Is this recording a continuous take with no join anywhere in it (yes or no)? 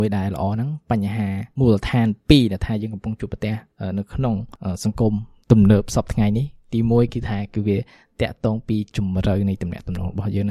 yes